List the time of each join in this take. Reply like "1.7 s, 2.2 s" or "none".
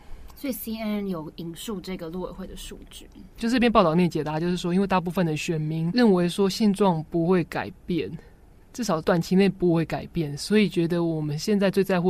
3.3 s